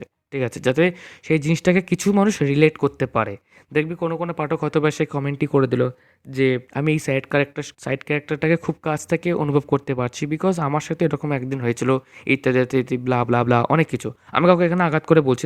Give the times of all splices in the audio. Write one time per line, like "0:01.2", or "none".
0:06.7
0:07.7